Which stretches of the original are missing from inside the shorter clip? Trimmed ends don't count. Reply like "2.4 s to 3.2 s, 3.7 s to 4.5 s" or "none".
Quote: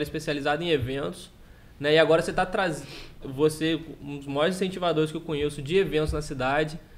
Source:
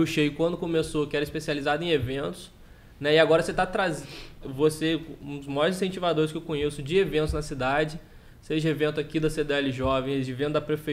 none